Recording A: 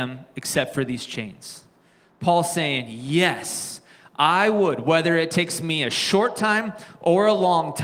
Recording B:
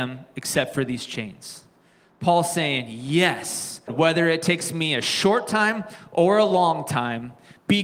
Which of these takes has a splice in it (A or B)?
B